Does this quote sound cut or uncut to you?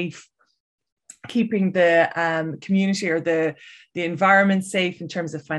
uncut